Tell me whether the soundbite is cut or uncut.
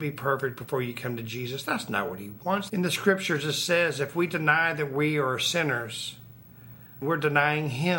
cut